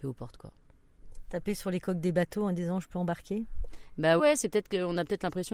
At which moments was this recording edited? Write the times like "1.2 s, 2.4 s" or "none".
4.2 s